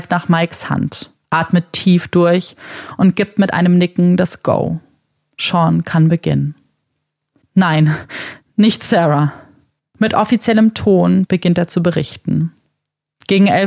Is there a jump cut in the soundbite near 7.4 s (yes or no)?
yes